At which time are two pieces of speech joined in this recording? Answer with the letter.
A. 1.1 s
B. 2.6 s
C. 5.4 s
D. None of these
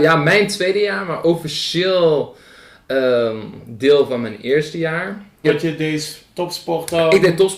C